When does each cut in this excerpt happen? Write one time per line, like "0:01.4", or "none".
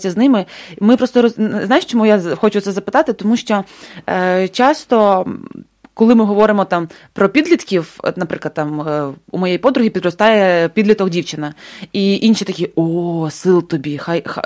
none